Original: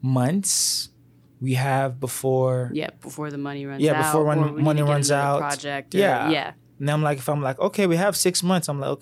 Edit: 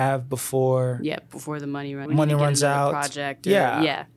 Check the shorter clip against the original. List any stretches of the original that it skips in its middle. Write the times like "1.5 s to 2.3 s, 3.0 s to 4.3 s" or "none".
3.8 s to 4.5 s